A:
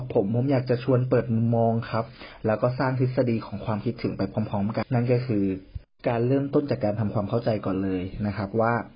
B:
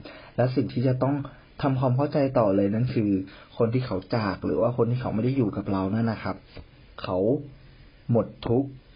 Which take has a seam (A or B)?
A